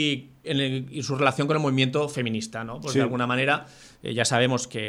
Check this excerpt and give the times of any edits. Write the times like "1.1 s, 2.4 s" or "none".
none